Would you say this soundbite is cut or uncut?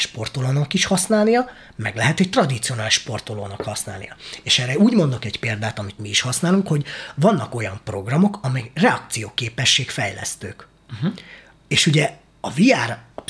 uncut